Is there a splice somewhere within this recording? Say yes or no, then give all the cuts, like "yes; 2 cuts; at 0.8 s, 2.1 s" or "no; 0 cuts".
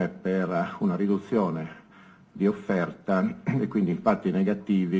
no; 0 cuts